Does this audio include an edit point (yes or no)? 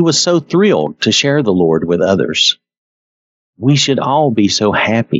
no